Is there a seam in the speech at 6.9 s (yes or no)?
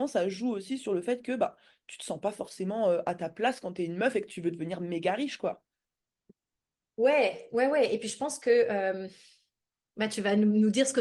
no